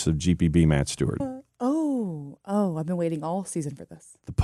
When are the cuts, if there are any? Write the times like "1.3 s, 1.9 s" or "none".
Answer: 1.2 s

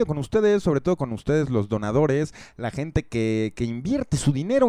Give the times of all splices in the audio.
none

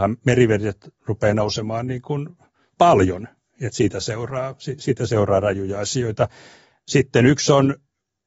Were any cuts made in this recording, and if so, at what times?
none

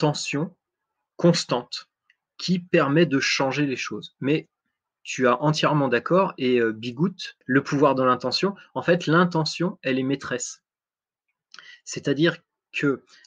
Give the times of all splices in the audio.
7.4 s

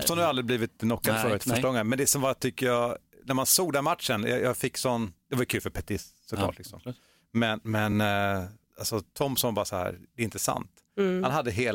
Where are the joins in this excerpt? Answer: none

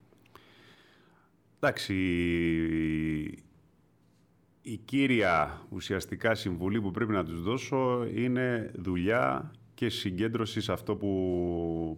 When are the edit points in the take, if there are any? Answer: none

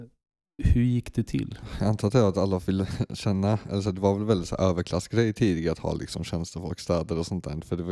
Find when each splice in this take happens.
none

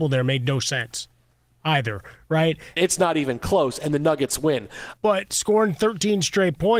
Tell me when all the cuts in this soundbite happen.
2.8 s, 5.0 s

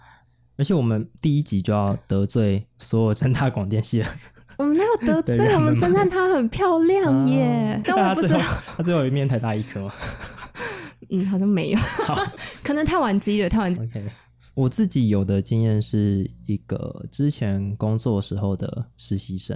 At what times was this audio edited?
7.8 s, 13.8 s

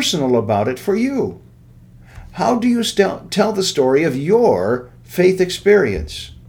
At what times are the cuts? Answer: none

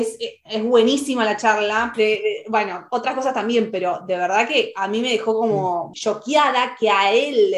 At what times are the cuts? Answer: 1.9 s, 5.9 s

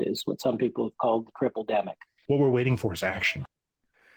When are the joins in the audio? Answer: 2.3 s

